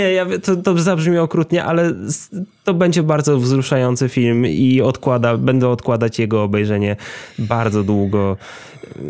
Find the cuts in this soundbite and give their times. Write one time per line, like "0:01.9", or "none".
none